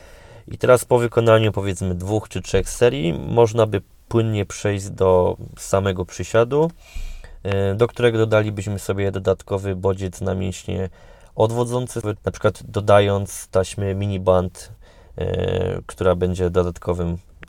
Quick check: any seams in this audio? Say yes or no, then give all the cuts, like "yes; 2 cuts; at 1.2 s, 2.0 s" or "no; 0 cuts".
yes; 1 cut; at 12.2 s